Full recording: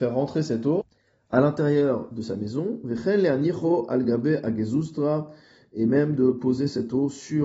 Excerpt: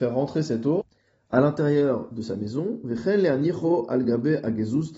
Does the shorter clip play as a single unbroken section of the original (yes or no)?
yes